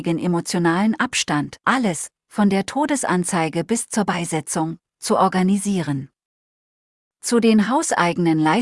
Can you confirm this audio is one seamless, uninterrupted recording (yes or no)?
no